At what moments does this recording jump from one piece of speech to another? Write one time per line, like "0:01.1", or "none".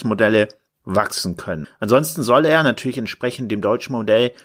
0:01.6